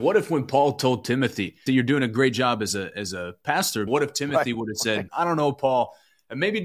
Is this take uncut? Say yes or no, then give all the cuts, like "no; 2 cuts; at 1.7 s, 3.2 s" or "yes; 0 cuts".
no; 3 cuts; at 1.7 s, 3.9 s, 5.1 s